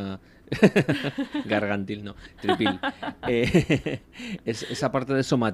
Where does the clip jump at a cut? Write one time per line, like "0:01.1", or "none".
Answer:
none